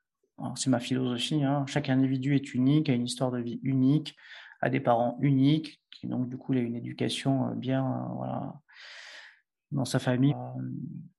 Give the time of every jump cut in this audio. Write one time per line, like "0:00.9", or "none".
0:10.3